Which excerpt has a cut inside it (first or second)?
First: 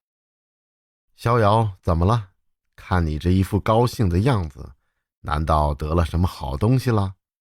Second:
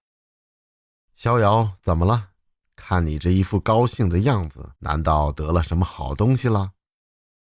second